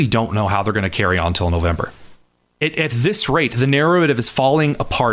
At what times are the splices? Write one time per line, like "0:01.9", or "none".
0:02.4